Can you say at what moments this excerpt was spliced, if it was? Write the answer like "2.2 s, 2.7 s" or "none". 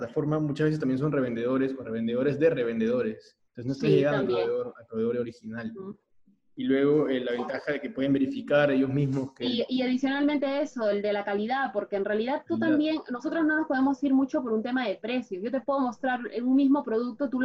3.5 s